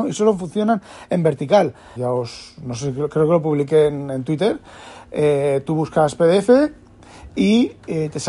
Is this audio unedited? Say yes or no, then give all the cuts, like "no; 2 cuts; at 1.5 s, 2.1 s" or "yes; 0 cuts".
no; 1 cut; at 2.0 s